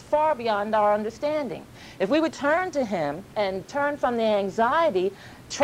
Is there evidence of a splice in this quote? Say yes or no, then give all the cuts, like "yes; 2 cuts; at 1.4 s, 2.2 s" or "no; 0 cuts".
yes; 1 cut; at 2.3 s